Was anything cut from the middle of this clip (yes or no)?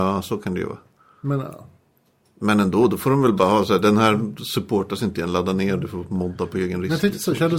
no